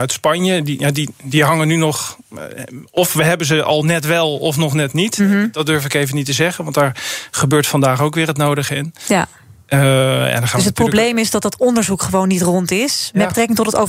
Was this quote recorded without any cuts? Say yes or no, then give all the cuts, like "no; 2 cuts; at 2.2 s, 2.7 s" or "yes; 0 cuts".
yes; 0 cuts